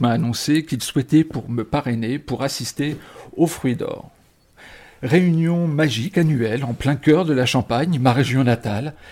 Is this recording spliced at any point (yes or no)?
no